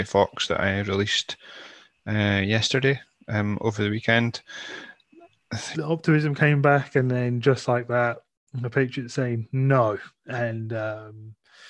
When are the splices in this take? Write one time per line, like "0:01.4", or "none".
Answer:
0:05.7